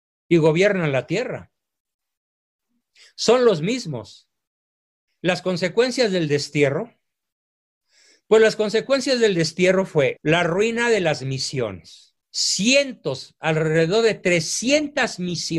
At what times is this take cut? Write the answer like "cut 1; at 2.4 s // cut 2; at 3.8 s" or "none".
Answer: cut 1; at 5.1 s // cut 2; at 10.2 s // cut 3; at 12.2 s